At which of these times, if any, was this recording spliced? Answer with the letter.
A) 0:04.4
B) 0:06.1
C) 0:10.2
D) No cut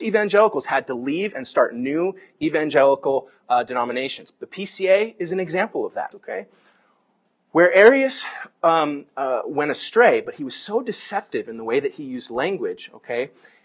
B